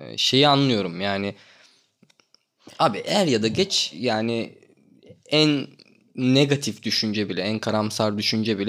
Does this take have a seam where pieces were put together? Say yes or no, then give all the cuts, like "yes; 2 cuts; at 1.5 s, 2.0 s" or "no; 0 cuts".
no; 0 cuts